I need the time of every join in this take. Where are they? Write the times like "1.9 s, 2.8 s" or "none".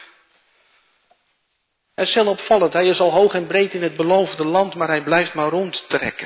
none